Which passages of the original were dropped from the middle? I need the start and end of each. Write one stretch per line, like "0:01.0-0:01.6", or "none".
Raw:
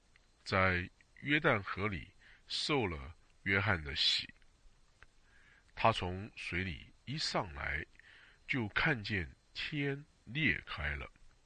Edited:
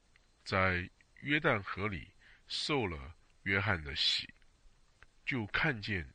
0:05.2-0:08.5